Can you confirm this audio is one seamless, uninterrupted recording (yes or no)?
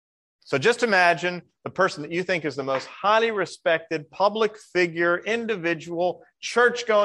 yes